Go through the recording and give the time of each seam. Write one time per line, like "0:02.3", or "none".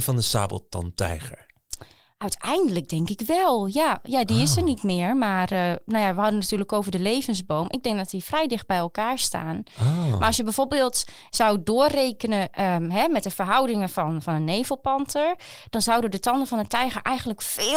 none